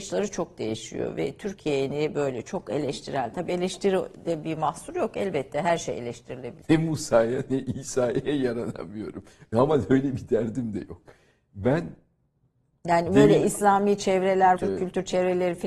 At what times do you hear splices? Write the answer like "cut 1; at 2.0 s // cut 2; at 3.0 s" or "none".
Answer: cut 1; at 6.6 s // cut 2; at 14.6 s